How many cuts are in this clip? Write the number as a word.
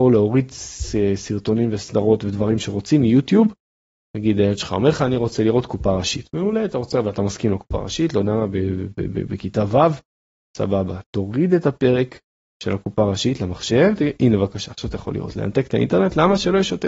zero